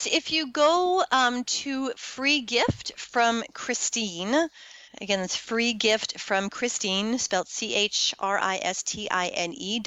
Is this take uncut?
no; 1 cut; at 4.9 s

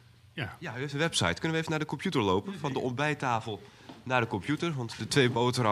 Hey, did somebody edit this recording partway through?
no; 0 cuts

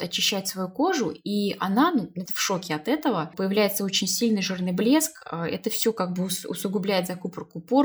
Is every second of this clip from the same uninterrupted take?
no; 1 cut; at 2.3 s

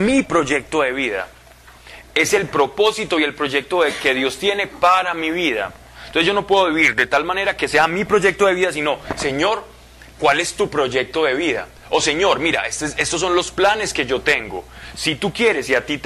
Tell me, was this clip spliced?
no; 0 cuts

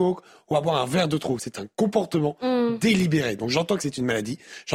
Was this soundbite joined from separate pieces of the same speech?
no; 0 cuts

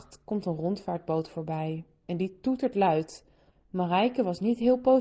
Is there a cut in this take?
yes; 1 cut; at 3.5 s

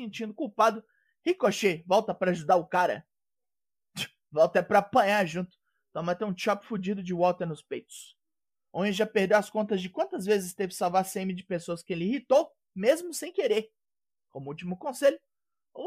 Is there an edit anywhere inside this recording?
yes; 1 cut; at 8.7 s

